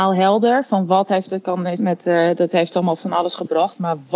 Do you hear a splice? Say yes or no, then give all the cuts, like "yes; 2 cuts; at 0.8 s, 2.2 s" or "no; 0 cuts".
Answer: yes; 1 cut; at 1.8 s